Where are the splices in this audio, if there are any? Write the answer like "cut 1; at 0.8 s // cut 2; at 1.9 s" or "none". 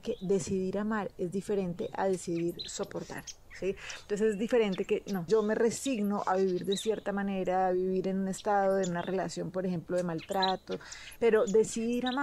cut 1; at 5.3 s // cut 2; at 11.2 s